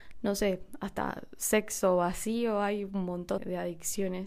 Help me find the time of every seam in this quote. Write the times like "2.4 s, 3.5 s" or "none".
3.4 s